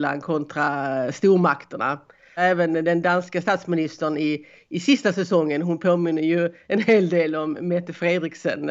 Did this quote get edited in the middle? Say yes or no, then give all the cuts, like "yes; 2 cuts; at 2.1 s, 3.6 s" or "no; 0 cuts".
no; 0 cuts